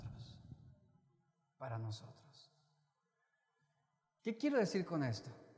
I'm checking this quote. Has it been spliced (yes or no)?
yes